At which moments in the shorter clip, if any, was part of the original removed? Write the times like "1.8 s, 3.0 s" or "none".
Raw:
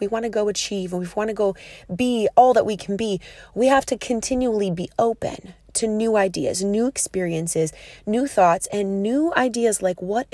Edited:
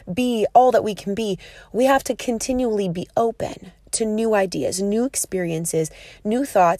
none